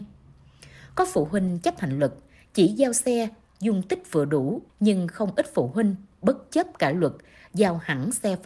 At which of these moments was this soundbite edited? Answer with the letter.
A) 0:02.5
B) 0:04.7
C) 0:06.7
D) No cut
B